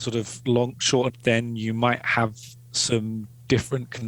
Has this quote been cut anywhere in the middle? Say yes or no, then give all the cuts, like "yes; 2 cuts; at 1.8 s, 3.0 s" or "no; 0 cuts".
yes; 1 cut; at 1.1 s